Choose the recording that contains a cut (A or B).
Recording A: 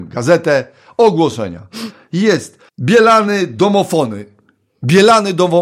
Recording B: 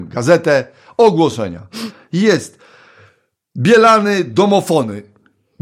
A